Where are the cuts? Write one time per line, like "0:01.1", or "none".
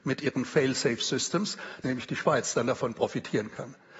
0:01.8